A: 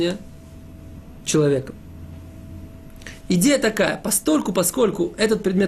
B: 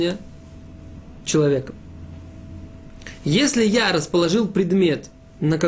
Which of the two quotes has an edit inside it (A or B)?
A